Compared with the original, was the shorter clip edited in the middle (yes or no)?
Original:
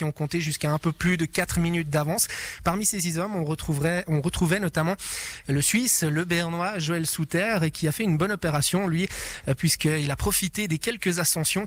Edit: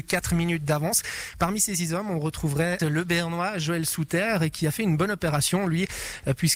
yes